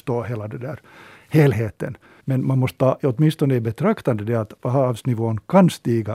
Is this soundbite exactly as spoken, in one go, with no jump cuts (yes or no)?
no